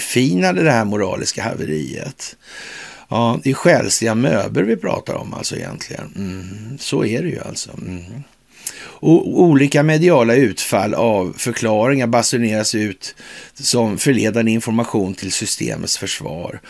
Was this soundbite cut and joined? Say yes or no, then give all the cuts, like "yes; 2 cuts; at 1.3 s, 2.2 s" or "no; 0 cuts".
no; 0 cuts